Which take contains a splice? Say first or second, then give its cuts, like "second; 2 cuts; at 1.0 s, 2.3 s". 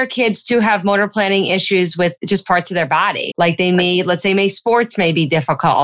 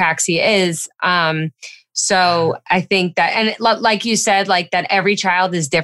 first; 2 cuts; at 2.2 s, 3.3 s